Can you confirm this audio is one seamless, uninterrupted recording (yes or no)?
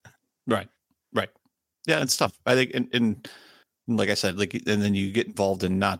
yes